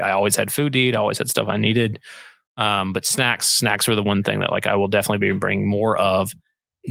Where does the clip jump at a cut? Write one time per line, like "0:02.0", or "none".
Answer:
none